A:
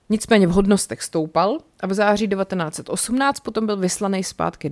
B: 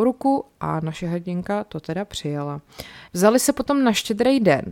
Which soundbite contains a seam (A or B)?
B